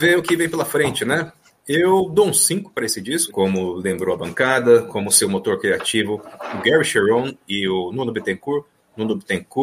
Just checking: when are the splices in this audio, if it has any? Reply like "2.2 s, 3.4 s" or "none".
3.3 s